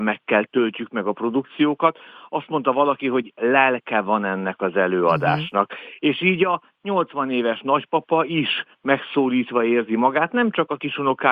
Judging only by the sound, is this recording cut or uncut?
uncut